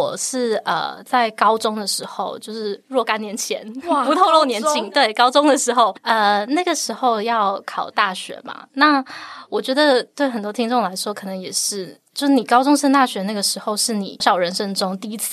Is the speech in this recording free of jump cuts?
no; 1 cut; at 14.2 s

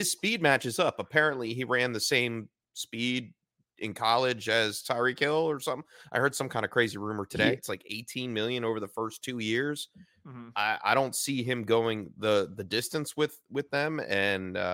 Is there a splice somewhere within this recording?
yes; 1 cut; at 7.6 s

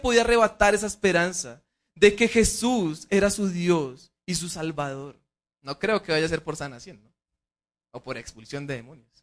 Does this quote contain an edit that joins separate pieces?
yes; 1 cut; at 5.5 s

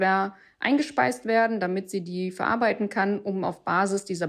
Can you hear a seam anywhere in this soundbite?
no; 0 cuts

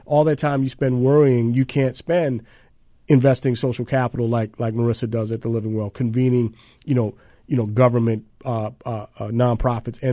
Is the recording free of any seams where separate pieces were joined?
yes; 0 cuts

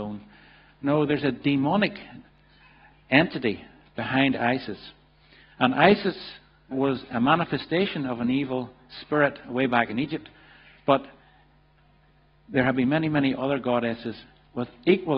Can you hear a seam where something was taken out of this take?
yes; 1 cut; at 6.7 s

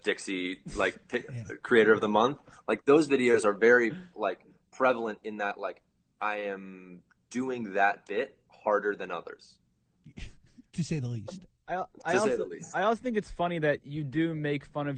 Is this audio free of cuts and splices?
yes; 0 cuts

